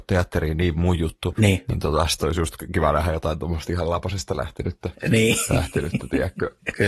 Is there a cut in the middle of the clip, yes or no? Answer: no